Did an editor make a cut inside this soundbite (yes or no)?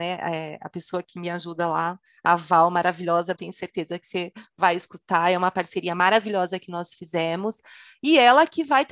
yes